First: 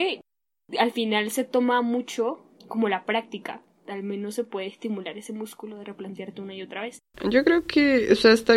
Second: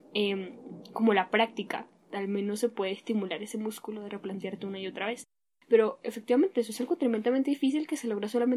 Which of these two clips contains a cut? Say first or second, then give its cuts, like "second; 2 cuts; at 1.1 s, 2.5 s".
first; 2 cuts; at 2.6 s, 7.1 s